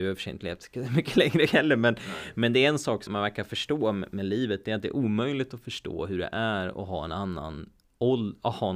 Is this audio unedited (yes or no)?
no